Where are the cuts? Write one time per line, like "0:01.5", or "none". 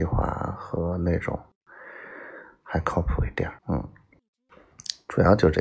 0:03.6